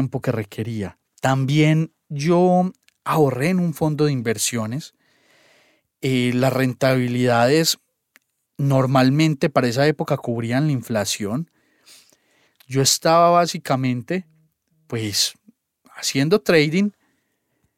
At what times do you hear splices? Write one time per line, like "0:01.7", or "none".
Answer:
0:01.0
0:12.5